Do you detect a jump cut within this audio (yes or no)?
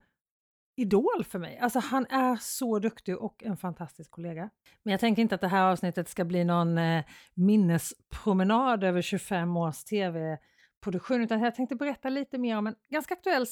no